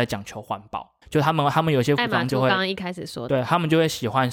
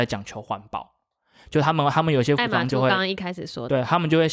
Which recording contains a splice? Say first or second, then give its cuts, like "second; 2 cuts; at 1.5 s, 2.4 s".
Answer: first; 1 cut; at 1.0 s